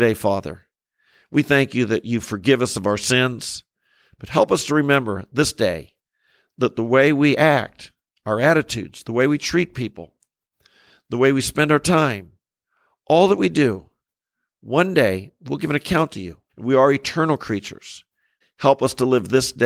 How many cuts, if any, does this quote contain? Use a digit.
2